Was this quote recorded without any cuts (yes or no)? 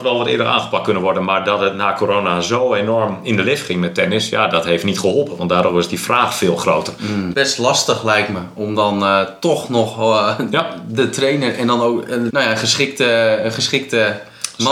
no